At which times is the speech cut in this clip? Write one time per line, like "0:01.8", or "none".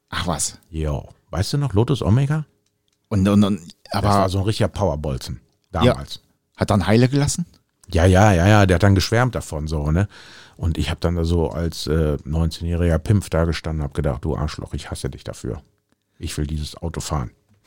none